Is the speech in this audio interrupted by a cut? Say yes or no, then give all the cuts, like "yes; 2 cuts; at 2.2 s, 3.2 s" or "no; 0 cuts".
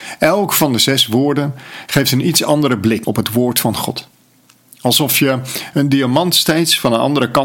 yes; 1 cut; at 3.0 s